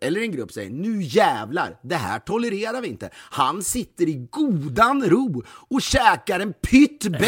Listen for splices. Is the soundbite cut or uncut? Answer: uncut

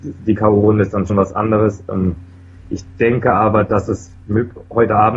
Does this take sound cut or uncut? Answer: cut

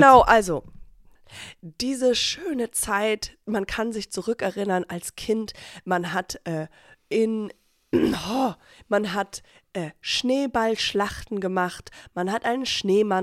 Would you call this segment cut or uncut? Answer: uncut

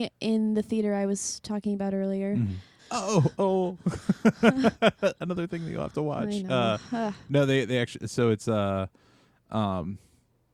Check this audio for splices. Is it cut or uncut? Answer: cut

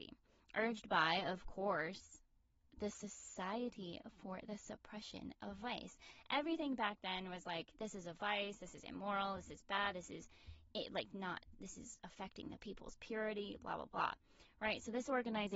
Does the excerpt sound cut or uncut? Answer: uncut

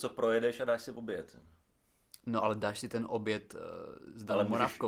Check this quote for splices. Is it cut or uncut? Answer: uncut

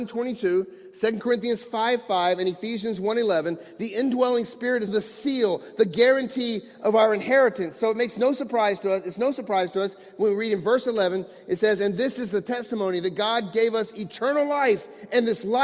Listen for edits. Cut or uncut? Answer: cut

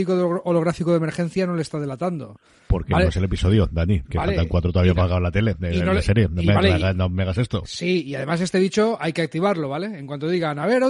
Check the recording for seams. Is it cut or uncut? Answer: uncut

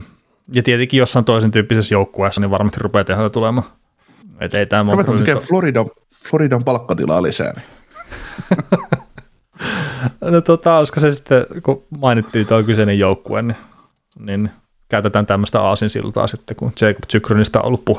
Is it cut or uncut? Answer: cut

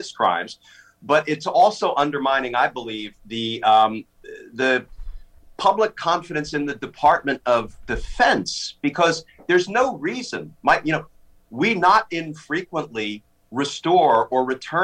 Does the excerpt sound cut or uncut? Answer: uncut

